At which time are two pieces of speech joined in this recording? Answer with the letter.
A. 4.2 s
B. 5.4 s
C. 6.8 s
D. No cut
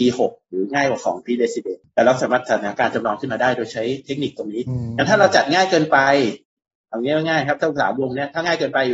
D